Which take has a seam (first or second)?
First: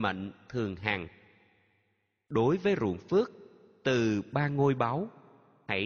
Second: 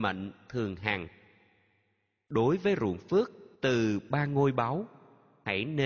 second